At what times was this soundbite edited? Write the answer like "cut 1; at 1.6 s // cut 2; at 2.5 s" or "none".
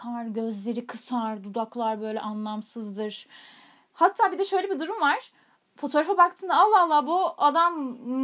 none

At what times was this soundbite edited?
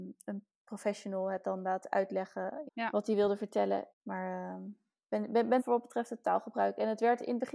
cut 1; at 2.7 s // cut 2; at 3.9 s // cut 3; at 5.6 s

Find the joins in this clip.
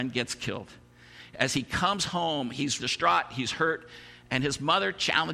cut 1; at 2.8 s

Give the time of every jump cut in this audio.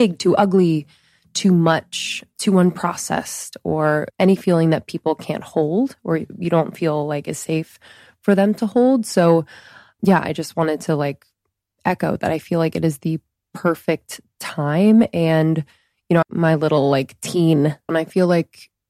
cut 1; at 16.2 s // cut 2; at 17.9 s

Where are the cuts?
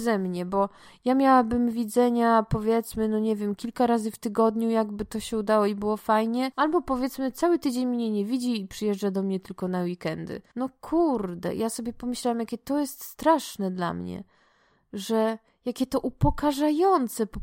none

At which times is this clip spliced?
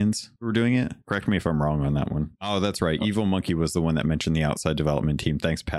none

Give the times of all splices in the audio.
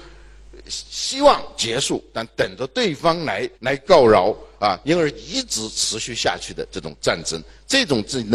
cut 1; at 3.5 s // cut 2; at 4.8 s

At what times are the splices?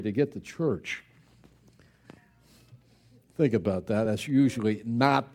none

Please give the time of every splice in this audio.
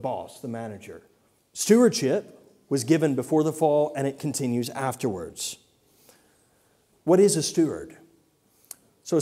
cut 1; at 1.4 s // cut 2; at 6.9 s

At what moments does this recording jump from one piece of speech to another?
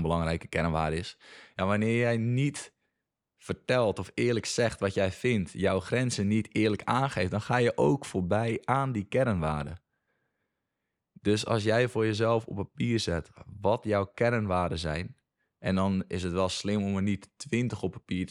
none

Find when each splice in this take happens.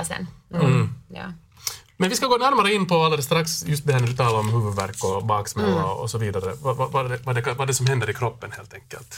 none

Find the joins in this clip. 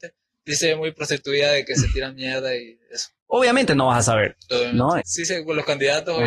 cut 1; at 3.2 s // cut 2; at 5.0 s

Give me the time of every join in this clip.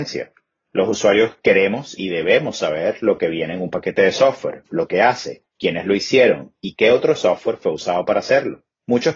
cut 1; at 5.5 s

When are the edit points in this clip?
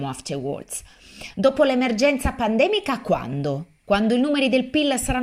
none

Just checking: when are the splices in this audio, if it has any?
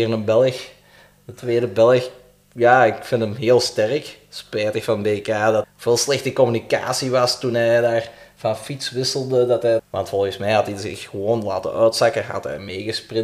cut 1; at 5.6 s // cut 2; at 9.8 s

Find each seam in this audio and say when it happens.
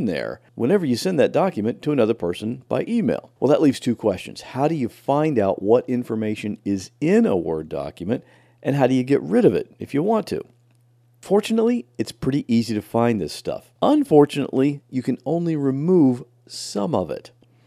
cut 1; at 3.4 s // cut 2; at 13.7 s

